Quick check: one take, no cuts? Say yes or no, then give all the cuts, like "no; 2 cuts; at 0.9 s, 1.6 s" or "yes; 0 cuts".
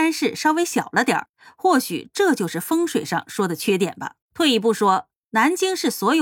no; 1 cut; at 4.2 s